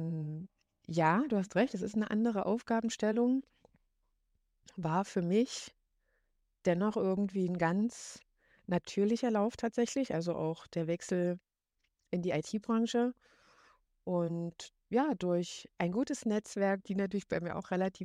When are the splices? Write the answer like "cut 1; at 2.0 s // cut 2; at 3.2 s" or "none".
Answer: cut 1; at 16.8 s